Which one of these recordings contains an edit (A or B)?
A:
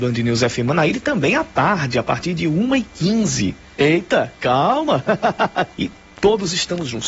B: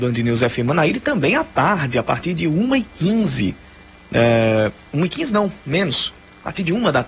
A